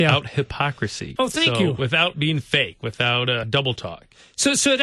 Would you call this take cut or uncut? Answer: cut